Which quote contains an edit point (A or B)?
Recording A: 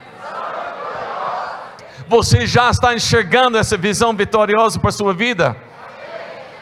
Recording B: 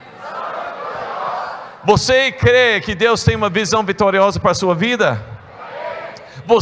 A